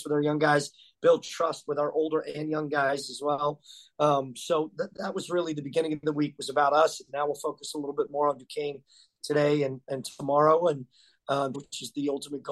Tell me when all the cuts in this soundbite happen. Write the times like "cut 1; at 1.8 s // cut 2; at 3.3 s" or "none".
cut 1; at 11.5 s